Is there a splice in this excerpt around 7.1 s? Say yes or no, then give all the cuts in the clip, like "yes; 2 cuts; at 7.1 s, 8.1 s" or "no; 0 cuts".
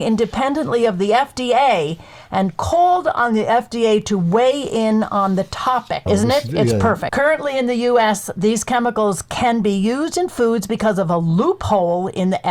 yes; 2 cuts; at 6.1 s, 7.1 s